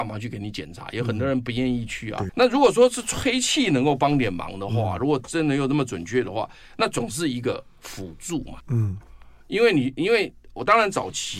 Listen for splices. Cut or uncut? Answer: cut